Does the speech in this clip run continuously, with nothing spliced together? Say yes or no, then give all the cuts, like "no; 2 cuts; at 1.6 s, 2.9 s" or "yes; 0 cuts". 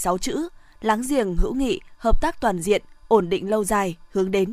yes; 0 cuts